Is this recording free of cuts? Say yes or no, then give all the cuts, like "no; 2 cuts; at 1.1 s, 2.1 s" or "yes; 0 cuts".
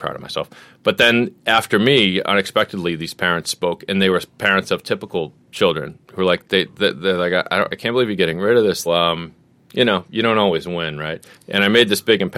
no; 2 cuts; at 8.9 s, 11.3 s